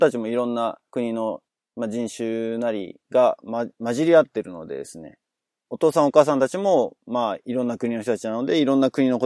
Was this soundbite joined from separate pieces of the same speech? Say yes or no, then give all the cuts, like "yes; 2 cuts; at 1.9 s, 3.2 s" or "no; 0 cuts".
no; 0 cuts